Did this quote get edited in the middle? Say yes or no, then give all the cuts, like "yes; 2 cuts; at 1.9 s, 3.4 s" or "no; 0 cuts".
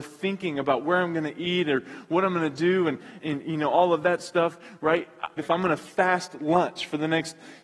yes; 2 cuts; at 3.2 s, 5.4 s